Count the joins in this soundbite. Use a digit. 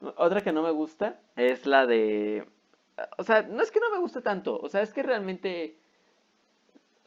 1